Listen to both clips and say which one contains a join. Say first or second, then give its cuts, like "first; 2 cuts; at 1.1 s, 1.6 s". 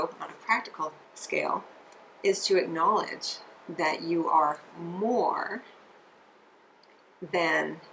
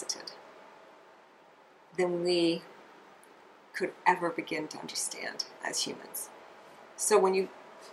first; 1 cut; at 1.0 s